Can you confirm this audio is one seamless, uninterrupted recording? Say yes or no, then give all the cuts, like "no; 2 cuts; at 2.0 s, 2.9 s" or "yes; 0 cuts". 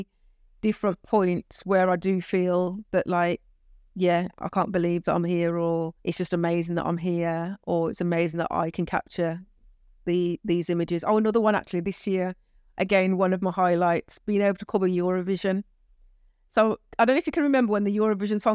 no; 1 cut; at 6.0 s